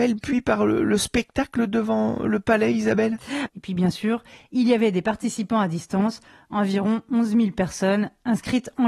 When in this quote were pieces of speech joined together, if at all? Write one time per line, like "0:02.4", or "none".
0:03.5